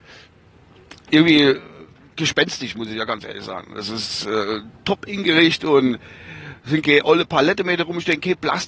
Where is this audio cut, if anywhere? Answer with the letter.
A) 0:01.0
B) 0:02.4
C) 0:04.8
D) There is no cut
D